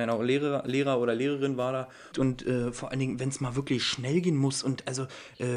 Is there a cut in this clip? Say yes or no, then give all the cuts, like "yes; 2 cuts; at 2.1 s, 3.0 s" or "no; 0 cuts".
yes; 1 cut; at 2.1 s